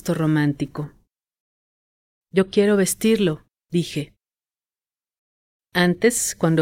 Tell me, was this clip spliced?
no; 0 cuts

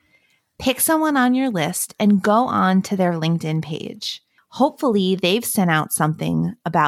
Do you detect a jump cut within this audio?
yes; 1 cut; at 4.4 s

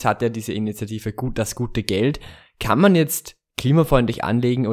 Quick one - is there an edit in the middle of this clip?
no; 0 cuts

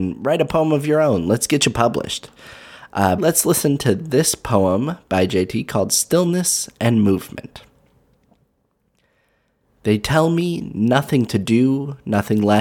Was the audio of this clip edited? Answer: yes; 1 cut; at 3.2 s

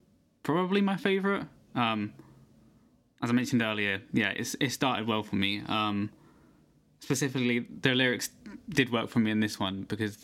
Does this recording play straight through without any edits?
yes; 0 cuts

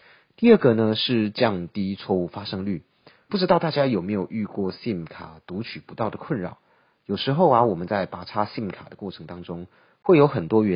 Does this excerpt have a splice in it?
yes; 1 cut; at 3.3 s

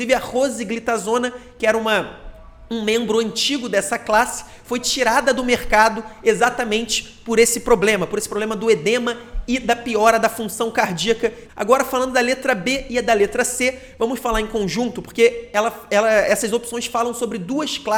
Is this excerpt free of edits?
no; 1 cut; at 11.5 s

